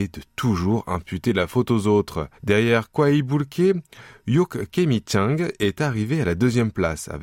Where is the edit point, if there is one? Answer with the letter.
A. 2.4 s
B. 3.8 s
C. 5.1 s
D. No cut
A